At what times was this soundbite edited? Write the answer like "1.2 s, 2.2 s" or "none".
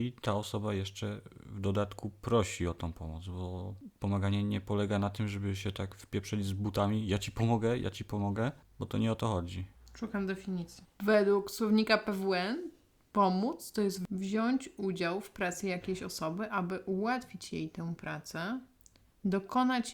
none